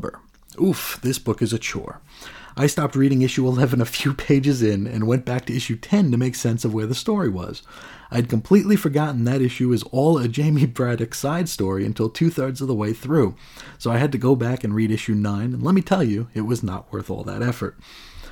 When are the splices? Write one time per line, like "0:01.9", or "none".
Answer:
none